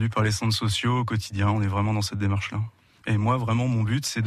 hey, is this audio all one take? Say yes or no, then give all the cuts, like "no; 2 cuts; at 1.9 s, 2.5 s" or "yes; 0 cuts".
no; 1 cut; at 3.0 s